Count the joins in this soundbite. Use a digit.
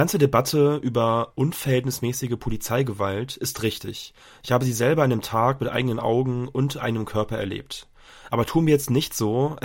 0